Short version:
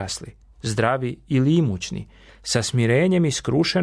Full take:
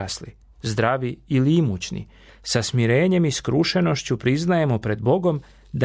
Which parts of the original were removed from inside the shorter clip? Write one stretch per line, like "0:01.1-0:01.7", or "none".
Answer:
none

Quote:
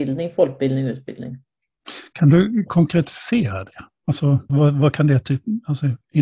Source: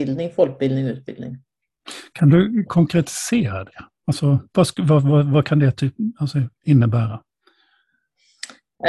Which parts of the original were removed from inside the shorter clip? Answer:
0:04.5-0:05.0

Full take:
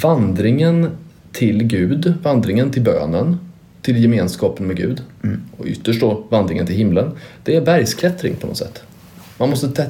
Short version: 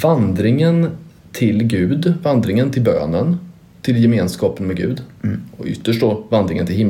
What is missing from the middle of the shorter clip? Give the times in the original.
none

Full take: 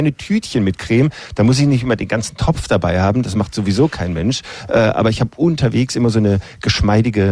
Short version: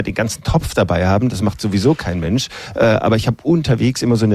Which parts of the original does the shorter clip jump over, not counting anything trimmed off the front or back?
none

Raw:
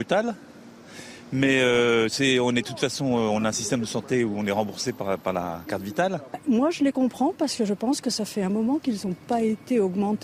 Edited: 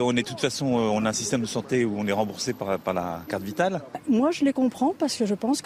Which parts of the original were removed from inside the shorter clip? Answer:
none

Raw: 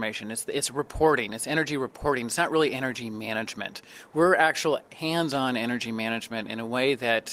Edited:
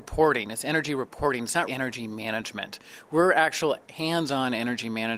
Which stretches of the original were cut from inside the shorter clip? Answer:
0:02.5-0:02.7

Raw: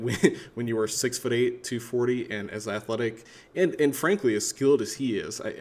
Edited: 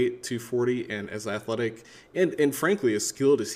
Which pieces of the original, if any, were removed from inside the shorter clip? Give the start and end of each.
none

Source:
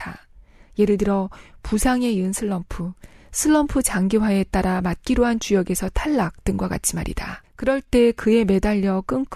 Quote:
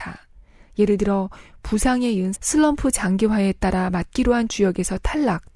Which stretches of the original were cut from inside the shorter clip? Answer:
0:02.3-0:03.2

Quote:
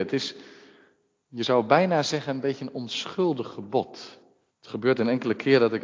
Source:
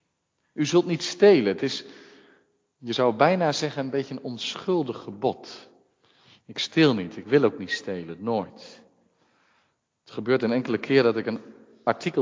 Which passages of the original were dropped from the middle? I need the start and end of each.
0:06.0-0:09.9

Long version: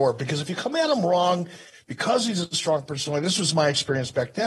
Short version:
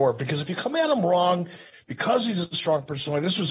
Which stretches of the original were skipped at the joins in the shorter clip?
none

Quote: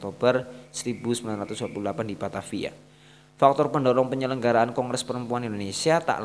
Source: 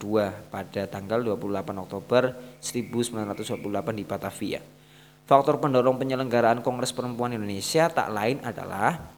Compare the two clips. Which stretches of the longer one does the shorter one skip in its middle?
none

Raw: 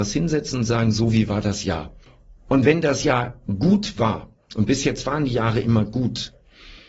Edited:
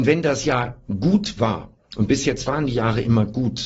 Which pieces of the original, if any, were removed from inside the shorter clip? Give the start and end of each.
none

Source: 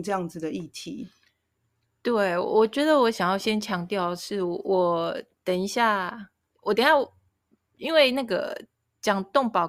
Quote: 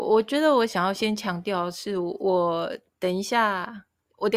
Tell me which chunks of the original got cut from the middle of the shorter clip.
none

